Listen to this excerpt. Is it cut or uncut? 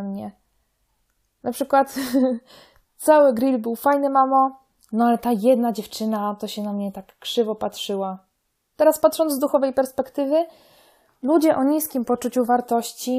cut